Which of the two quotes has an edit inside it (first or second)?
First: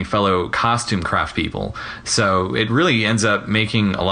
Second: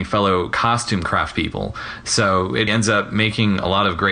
second